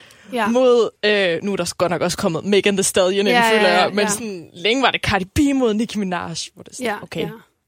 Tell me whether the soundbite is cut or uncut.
uncut